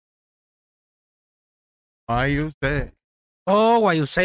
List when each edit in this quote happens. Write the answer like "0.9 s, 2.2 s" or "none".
none